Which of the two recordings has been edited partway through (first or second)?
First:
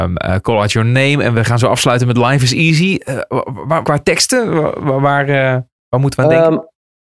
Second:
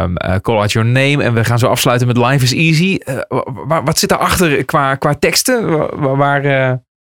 first